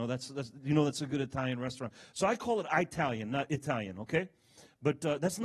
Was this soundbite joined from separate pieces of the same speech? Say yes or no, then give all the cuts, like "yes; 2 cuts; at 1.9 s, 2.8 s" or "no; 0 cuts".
no; 0 cuts